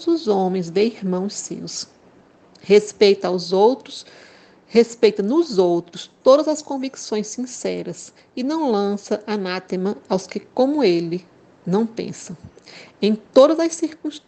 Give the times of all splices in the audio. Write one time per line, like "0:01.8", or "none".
none

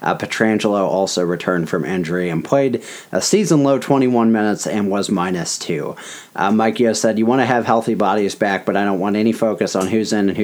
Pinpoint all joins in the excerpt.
none

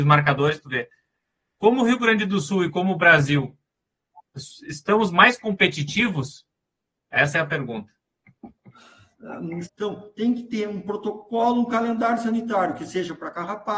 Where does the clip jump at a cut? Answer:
0:09.6

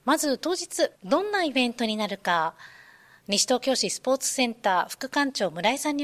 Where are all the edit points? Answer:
0:01.0

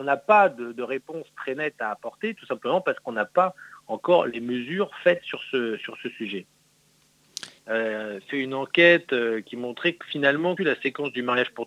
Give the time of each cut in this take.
0:07.6
0:10.6

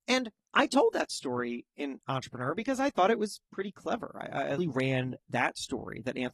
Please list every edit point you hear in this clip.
0:04.6

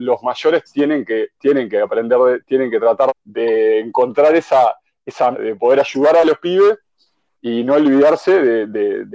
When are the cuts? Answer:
0:03.1
0:05.3

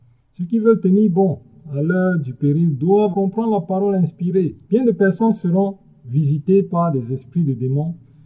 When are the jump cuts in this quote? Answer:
0:03.1
0:04.6

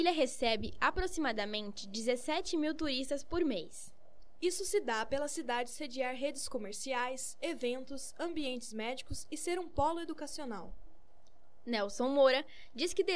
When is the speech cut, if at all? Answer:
none

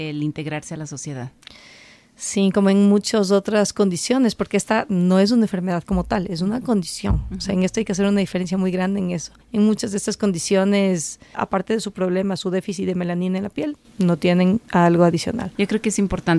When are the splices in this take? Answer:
0:09.4
0:11.3

